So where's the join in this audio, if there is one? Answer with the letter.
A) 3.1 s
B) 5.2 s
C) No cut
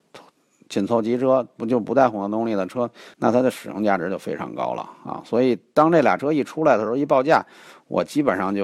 A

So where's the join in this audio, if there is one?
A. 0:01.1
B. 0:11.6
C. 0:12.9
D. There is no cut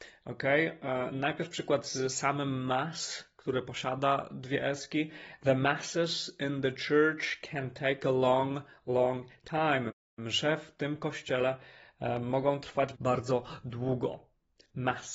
C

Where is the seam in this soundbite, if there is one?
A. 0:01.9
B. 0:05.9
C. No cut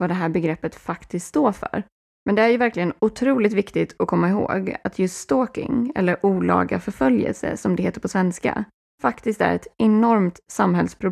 C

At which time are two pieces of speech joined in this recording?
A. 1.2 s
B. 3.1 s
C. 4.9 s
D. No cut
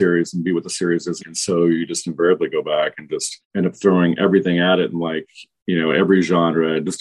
A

